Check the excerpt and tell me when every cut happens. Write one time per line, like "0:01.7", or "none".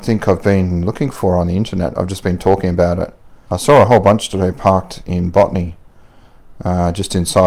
0:03.5